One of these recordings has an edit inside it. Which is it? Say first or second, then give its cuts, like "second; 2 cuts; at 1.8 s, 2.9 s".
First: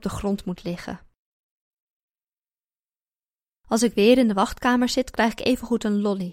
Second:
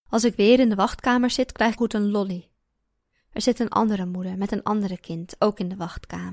second; 1 cut; at 1.8 s